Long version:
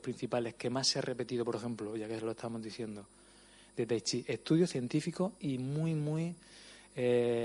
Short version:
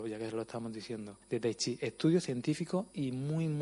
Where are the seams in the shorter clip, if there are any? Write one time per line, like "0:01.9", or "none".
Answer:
0:01.2